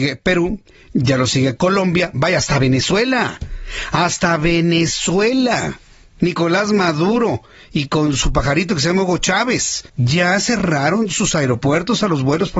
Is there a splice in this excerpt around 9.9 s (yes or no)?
yes